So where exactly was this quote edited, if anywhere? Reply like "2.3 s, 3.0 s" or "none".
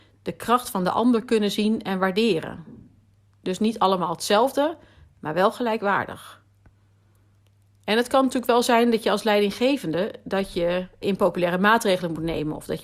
11.0 s